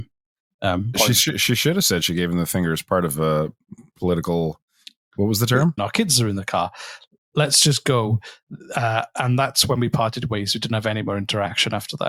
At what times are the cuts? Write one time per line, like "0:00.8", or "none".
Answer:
0:00.9
0:05.8